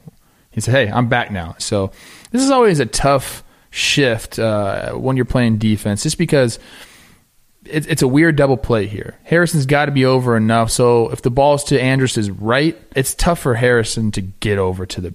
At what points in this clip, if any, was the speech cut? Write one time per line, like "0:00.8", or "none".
0:01.6
0:12.9